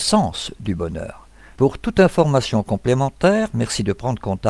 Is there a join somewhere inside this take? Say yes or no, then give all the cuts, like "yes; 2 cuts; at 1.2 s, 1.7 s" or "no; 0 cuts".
yes; 1 cut; at 1.6 s